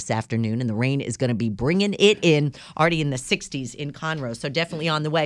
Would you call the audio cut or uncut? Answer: uncut